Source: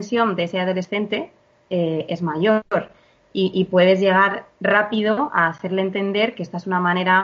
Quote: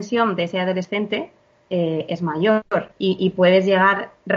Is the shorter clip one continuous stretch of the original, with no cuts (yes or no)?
no